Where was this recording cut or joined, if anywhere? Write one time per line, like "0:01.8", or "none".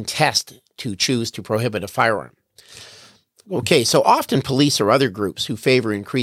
none